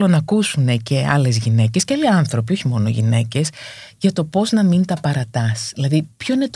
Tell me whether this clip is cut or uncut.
uncut